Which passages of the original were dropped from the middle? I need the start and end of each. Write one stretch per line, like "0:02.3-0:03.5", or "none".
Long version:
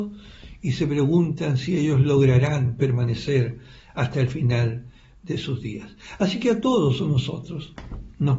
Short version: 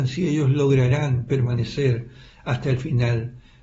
none

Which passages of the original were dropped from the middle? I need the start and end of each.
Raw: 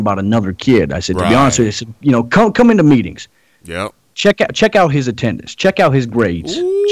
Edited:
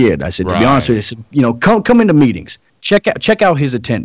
0:03.4-0:04.0

